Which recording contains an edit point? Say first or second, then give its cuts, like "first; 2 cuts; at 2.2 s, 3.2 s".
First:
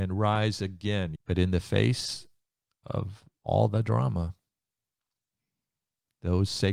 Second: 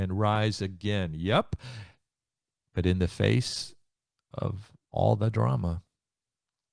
first; 1 cut; at 1.2 s